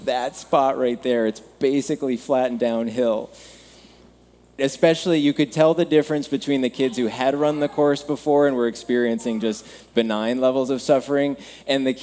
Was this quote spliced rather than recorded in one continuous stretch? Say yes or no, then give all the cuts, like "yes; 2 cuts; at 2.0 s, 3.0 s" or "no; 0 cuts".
yes; 1 cut; at 4.6 s